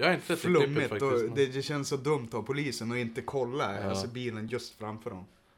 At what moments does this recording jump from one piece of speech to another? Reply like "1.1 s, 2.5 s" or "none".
none